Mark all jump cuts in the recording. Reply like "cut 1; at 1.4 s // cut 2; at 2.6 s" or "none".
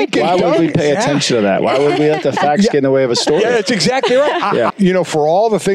cut 1; at 4.7 s